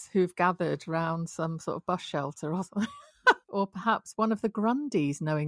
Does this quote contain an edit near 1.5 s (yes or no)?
no